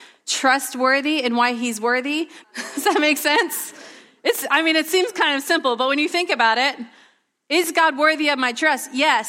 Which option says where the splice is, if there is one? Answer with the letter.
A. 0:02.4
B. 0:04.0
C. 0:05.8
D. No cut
A